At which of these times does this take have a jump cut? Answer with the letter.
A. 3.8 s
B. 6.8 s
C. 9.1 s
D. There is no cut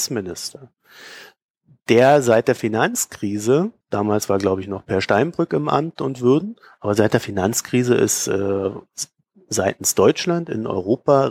A